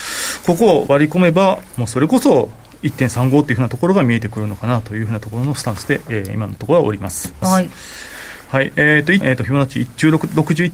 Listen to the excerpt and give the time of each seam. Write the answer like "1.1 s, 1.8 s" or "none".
7.4 s, 9.2 s

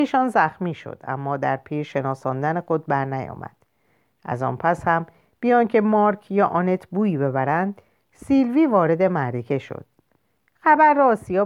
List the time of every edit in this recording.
none

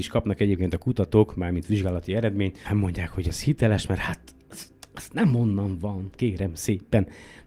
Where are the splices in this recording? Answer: 2.6 s

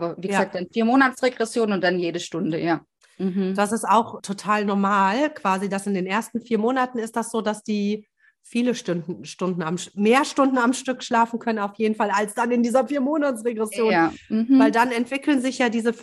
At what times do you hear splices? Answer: 4.2 s

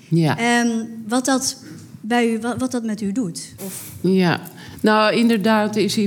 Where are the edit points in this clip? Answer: 3.6 s

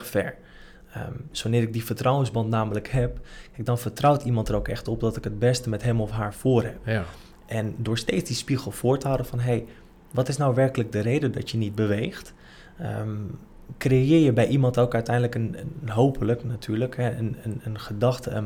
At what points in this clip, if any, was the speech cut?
none

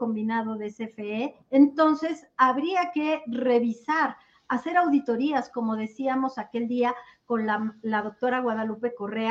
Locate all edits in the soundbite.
1.4 s

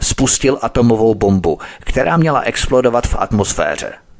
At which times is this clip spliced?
1.8 s

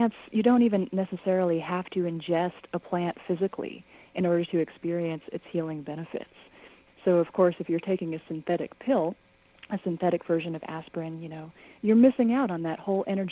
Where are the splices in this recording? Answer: 6.9 s, 11.7 s

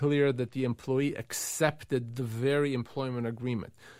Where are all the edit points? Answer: none

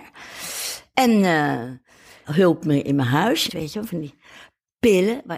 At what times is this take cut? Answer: 2.2 s, 3.5 s

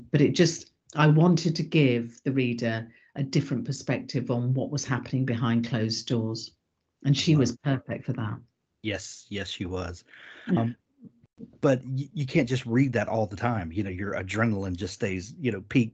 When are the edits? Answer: 10.6 s

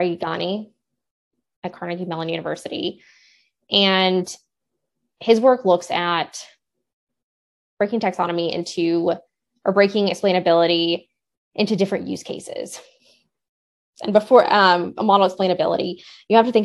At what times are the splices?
none

